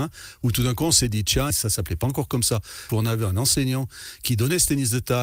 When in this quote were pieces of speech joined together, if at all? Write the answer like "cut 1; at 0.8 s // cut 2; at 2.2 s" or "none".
cut 1; at 1.5 s // cut 2; at 2.9 s